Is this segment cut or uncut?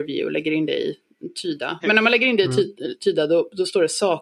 cut